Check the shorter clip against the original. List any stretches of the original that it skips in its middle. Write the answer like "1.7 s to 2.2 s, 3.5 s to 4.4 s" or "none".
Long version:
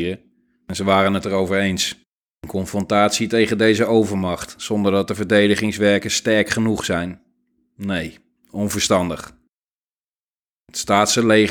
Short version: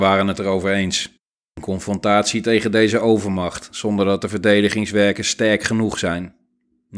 none